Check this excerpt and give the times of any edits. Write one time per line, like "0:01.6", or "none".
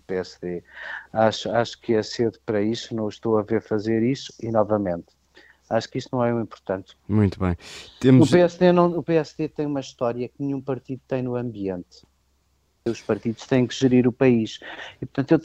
0:07.0
0:12.9